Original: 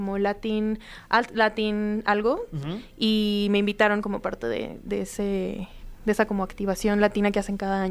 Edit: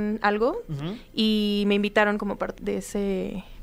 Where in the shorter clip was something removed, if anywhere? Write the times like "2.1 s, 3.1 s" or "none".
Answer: 2.6 s

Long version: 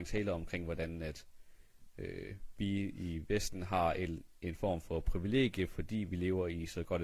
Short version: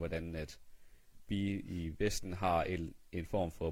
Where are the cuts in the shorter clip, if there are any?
1.3 s

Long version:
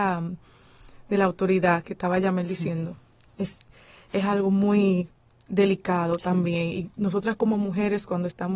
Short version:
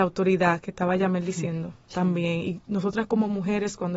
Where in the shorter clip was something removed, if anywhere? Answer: 1.9 s

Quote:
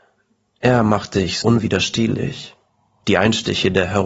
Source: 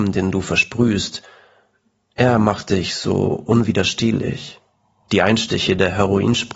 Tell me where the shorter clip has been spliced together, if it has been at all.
1.4 s

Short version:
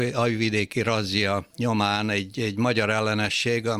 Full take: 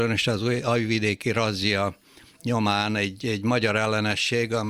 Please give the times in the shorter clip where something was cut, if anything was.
1.5 s

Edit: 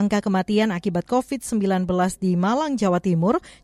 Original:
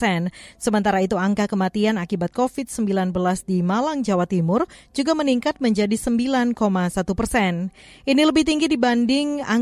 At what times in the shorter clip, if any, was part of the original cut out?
none

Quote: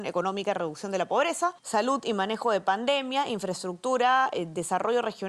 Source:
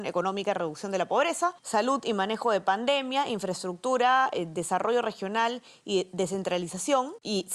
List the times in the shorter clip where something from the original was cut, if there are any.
none

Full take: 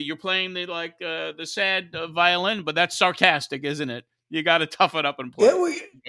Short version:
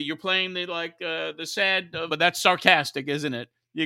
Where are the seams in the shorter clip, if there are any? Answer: 2.1 s

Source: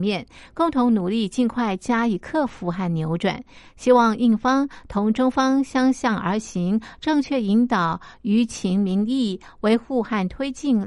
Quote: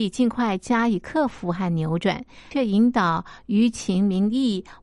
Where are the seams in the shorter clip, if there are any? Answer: 2.5 s

